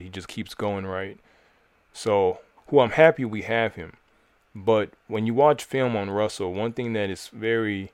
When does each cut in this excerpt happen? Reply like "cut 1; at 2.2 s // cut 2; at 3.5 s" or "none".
cut 1; at 2.6 s // cut 2; at 4.4 s